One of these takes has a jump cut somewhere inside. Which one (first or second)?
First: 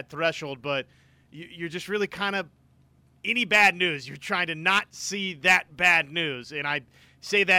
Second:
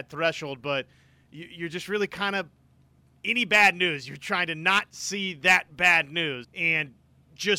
second